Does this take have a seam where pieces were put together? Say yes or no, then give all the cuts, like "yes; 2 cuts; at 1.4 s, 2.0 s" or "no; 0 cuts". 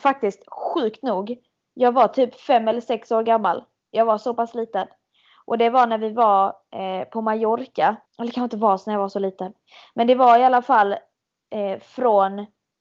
yes; 1 cut; at 8.1 s